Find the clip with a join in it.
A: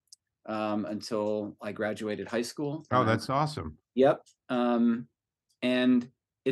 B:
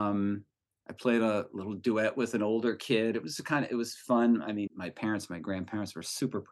B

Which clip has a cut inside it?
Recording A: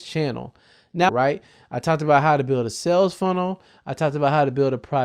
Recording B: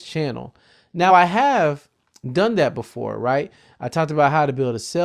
A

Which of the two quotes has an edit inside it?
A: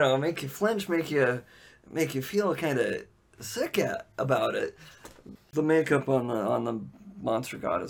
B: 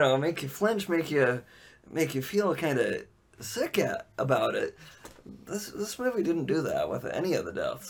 A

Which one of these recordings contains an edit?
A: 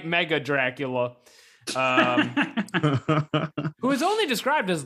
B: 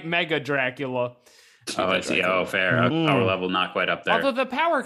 B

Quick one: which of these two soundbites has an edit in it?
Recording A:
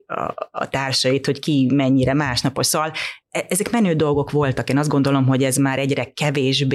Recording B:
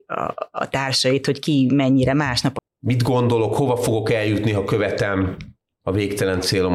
B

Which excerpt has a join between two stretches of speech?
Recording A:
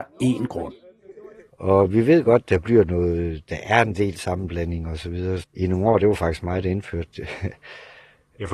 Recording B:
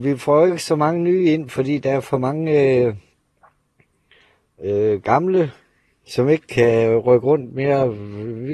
A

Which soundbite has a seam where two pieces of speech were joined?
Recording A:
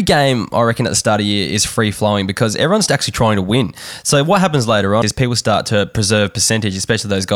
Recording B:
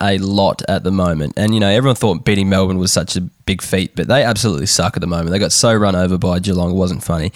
A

